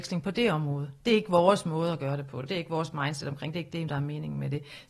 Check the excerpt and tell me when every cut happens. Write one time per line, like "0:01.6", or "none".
none